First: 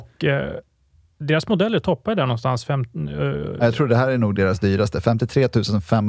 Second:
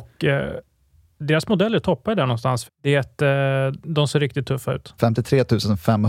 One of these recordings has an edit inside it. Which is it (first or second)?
second